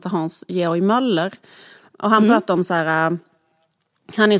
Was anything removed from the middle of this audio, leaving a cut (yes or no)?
no